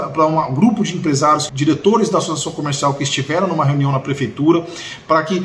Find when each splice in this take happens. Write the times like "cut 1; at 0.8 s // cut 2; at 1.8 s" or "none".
cut 1; at 1.5 s